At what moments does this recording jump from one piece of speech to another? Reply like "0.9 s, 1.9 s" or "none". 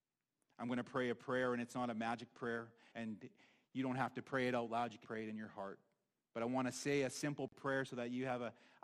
2.9 s, 5.0 s